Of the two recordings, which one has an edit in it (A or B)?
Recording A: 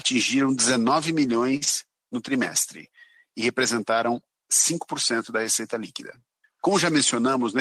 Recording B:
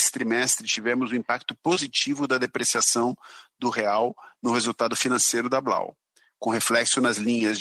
A